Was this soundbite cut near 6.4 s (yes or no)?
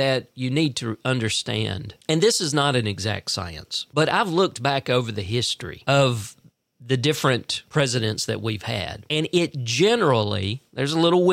no